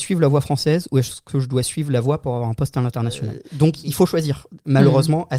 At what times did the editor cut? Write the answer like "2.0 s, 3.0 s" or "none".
none